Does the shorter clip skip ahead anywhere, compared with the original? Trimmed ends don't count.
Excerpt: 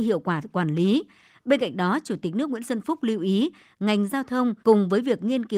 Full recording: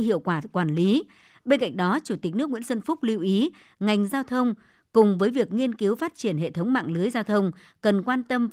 yes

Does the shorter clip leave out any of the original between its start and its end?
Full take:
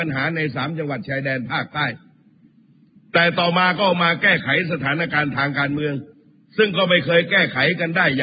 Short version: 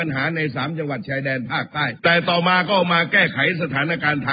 yes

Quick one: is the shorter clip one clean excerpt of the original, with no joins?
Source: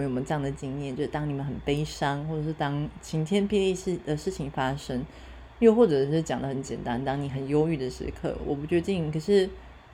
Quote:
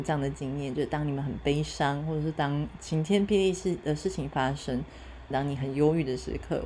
no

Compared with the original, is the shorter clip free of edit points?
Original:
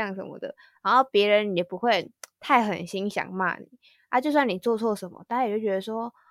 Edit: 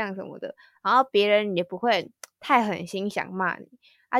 yes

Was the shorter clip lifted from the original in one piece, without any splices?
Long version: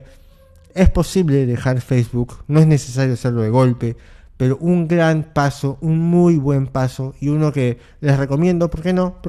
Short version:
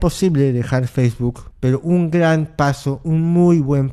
no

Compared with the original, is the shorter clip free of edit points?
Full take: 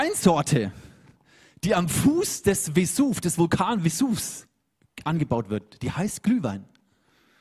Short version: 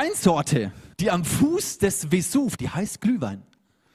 no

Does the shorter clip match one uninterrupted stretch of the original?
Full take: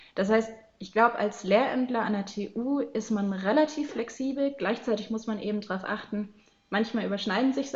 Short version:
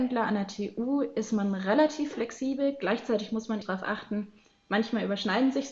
no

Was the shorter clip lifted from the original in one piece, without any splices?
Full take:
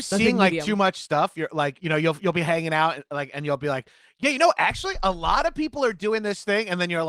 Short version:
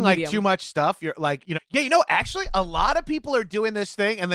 no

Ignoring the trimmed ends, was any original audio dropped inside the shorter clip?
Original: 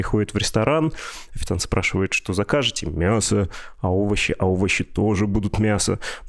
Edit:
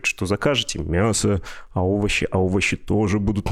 no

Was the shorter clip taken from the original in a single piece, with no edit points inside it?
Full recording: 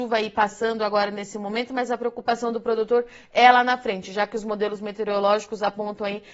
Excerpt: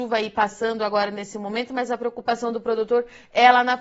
yes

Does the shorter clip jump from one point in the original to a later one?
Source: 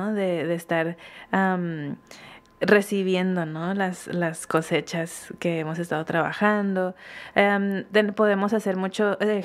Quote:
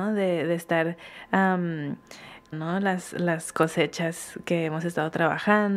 yes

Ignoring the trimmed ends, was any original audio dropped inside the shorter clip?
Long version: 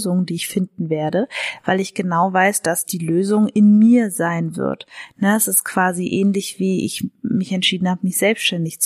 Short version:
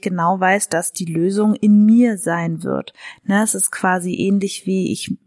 no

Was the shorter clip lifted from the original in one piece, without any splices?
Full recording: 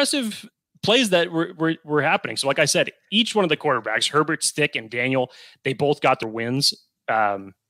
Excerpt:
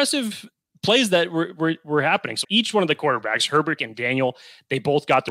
no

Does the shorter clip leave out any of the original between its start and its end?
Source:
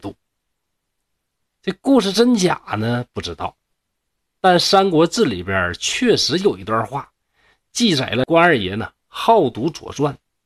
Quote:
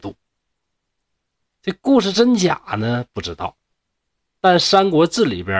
no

